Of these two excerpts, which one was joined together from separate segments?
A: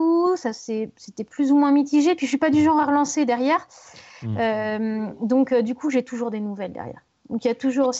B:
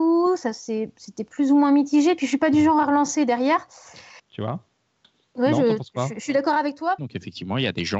B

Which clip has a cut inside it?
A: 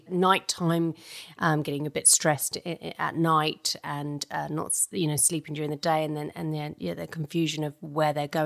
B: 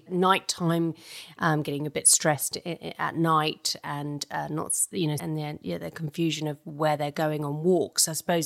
B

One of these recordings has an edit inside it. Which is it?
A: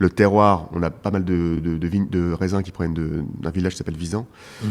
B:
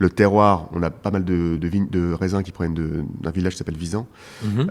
B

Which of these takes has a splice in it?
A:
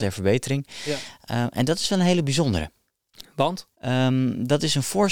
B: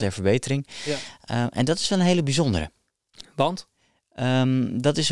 A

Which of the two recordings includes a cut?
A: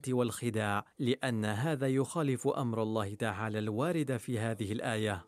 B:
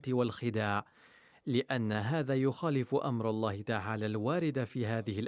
A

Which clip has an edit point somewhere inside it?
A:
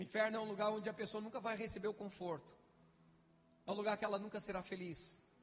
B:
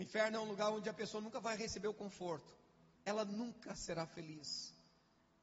B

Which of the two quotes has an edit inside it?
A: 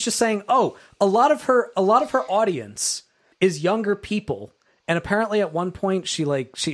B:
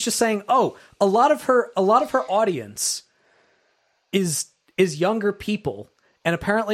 A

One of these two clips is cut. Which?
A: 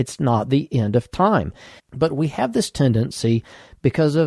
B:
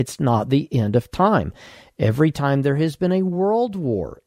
A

